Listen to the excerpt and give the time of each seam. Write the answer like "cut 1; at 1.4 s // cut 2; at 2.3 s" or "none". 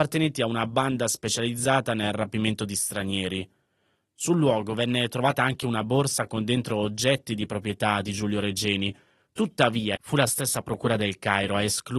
cut 1; at 9.9 s